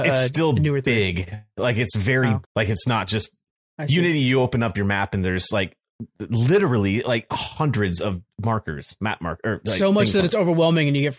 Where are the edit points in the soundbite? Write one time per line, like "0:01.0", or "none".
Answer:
0:02.4